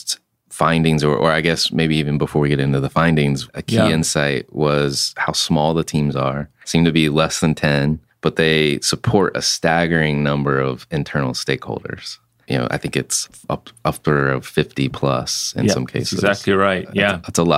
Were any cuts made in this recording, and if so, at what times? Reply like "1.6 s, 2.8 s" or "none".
3.5 s